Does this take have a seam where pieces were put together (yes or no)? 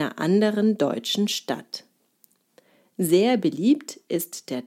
no